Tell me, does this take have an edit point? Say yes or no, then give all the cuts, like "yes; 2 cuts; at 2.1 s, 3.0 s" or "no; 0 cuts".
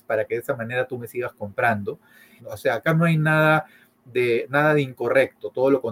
yes; 1 cut; at 2.4 s